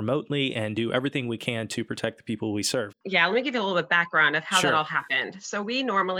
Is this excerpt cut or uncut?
cut